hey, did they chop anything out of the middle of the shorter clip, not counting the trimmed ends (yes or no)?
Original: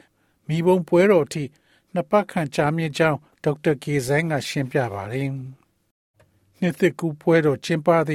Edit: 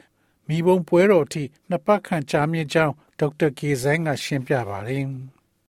yes